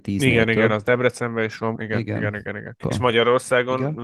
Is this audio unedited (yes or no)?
no